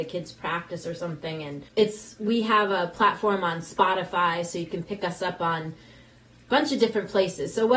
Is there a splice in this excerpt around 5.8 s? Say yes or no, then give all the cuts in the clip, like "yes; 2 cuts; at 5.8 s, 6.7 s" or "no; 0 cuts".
no; 1 cut; at 1.7 s